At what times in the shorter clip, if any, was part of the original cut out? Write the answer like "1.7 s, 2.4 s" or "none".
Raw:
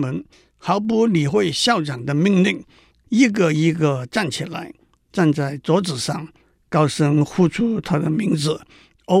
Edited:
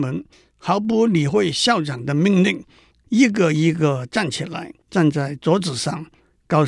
4.8 s